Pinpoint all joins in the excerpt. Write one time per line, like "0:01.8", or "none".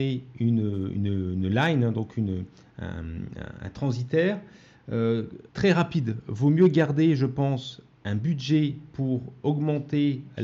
0:05.5